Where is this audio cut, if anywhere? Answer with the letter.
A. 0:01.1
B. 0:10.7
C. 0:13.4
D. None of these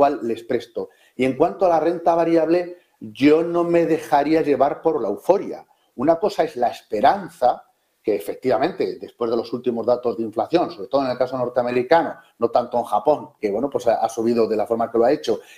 C